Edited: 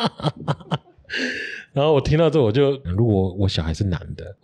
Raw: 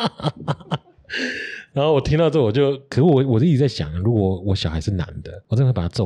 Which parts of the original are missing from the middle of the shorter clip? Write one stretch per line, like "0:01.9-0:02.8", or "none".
0:02.8-0:03.9